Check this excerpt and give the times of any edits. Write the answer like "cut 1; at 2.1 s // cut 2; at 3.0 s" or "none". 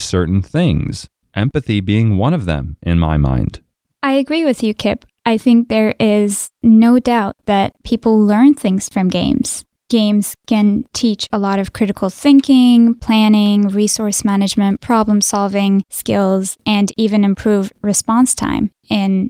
none